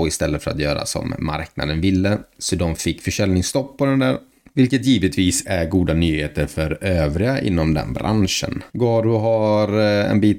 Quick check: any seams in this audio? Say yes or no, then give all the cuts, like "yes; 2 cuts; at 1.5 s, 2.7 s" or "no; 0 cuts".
yes; 1 cut; at 8.7 s